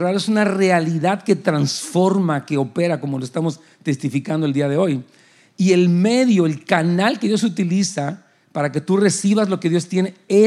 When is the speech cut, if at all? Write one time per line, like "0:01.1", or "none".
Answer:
none